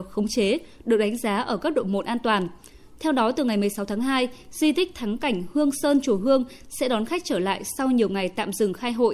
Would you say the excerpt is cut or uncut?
cut